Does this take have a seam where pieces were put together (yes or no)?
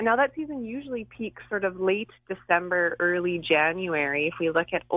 no